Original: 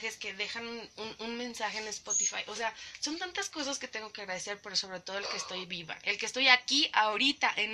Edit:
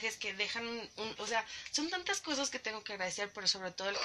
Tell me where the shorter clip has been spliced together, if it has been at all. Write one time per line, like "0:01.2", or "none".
0:01.2